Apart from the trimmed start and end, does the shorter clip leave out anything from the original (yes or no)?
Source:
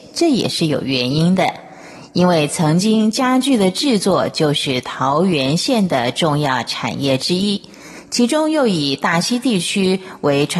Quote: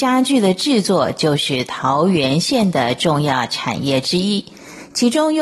no